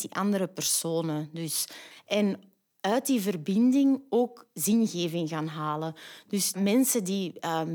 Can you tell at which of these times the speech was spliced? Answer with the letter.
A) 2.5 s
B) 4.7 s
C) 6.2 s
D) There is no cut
D